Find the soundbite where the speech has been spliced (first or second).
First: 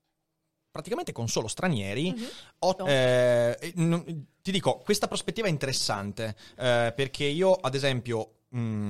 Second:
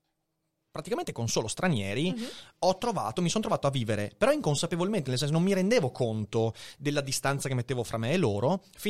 first